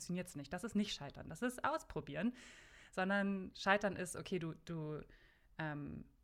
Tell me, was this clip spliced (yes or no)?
no